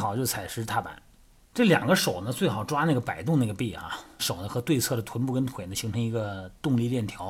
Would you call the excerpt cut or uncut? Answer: cut